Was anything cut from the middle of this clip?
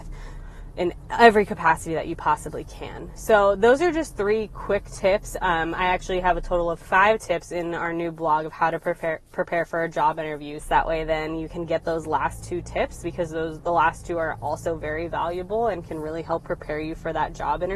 yes; 1 cut; at 10.6 s

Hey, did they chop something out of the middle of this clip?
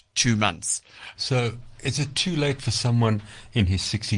yes; 1 cut; at 1.1 s

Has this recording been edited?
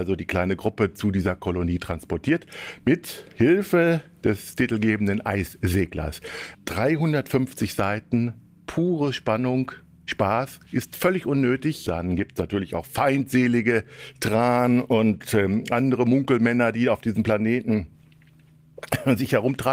yes; 3 cuts; at 6.5 s, 10.7 s, 11.9 s

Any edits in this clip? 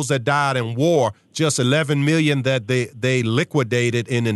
no; 0 cuts

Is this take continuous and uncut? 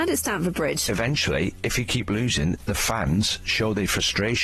yes; 0 cuts

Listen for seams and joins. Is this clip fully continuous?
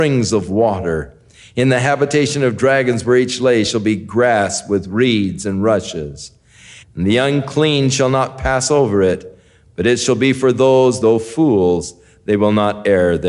no; 2 cuts; at 6.8 s, 11.0 s

